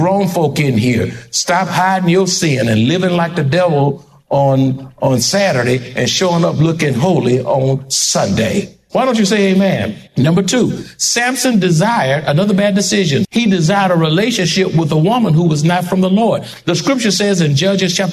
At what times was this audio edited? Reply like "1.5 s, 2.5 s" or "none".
8.9 s, 10.1 s, 13.2 s